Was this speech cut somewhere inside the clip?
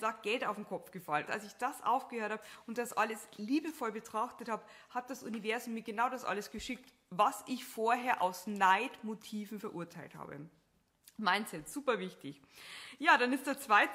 yes; 1 cut; at 1.3 s

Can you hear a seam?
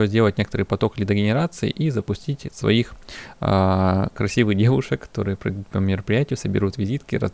no; 0 cuts

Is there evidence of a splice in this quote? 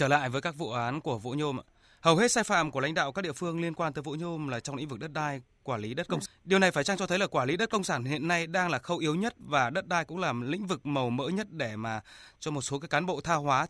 yes; 1 cut; at 6.3 s

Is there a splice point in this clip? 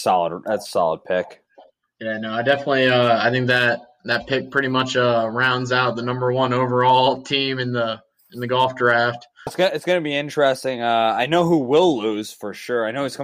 yes; 1 cut; at 9.5 s

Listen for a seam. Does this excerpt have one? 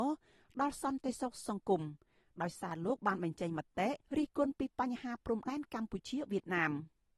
yes; 1 cut; at 4.0 s

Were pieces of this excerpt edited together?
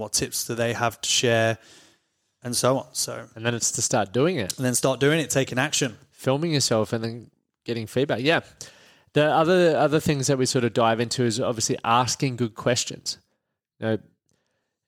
no; 0 cuts

